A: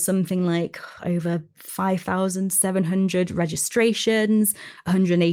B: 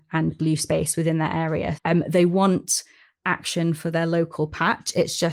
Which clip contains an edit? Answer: B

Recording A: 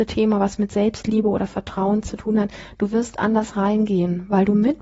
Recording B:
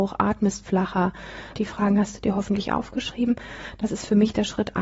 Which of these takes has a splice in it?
B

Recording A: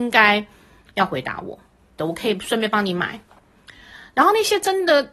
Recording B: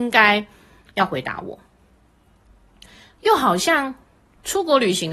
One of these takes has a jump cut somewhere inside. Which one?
A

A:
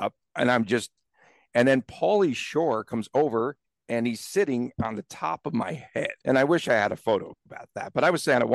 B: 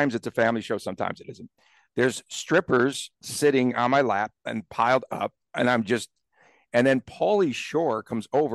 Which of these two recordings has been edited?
A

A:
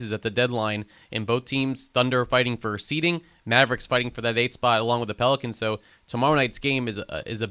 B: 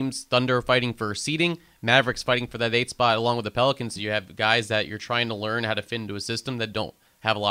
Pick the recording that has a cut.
B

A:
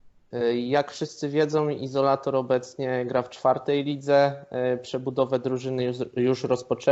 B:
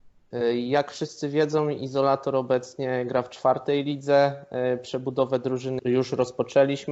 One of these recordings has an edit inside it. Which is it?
B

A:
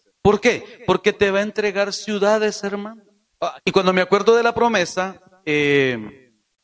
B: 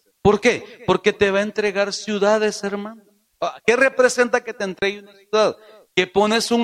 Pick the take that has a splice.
A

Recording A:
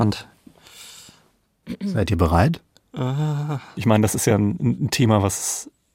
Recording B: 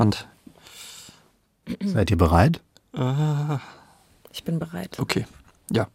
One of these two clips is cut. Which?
A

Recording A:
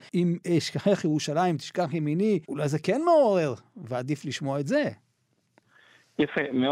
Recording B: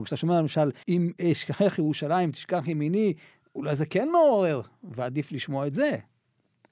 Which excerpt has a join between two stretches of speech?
A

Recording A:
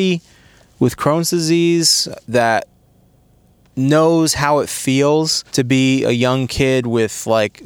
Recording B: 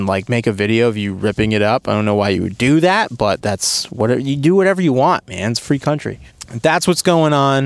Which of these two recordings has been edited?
A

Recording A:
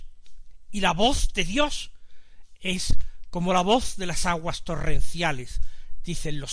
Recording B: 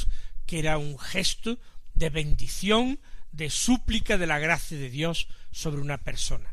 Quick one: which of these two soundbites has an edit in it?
B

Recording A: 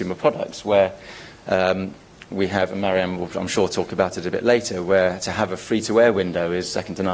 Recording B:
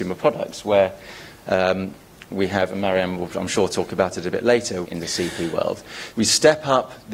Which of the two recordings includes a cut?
B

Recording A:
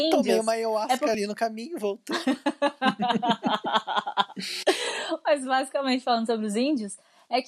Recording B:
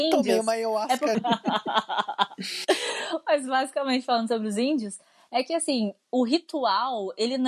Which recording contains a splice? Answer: B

